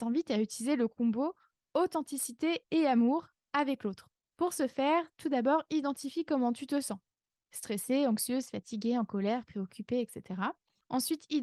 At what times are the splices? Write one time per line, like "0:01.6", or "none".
none